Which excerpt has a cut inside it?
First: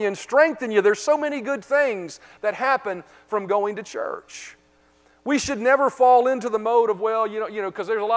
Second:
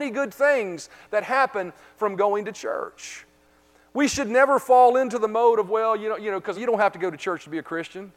second; 1 cut; at 6.5 s

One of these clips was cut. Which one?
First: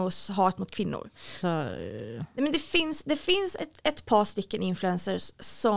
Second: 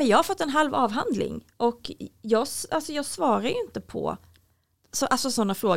first; 1 cut; at 1.4 s

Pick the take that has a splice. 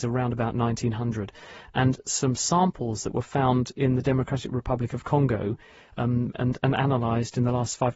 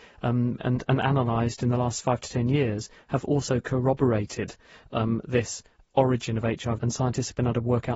second; 1 cut; at 6.8 s

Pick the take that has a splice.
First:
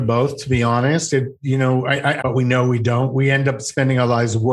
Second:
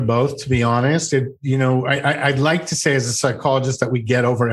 first; 1 cut; at 2.2 s

